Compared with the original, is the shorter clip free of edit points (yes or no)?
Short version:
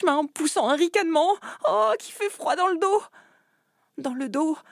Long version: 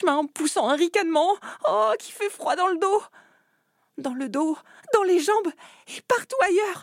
yes